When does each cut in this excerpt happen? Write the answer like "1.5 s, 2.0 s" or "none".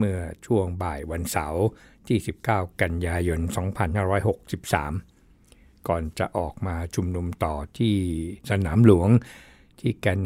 8.4 s